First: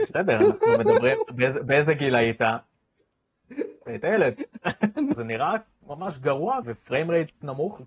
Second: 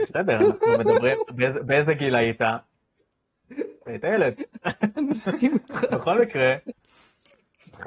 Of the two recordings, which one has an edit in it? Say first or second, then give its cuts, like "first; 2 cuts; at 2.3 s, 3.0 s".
first; 2 cuts; at 5.1 s, 6.6 s